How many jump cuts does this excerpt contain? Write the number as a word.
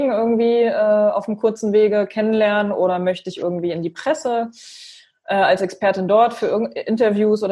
zero